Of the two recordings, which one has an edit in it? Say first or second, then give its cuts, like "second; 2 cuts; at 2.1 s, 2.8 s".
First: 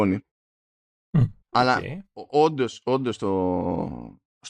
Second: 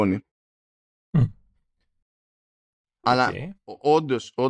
first; 1 cut; at 1.4 s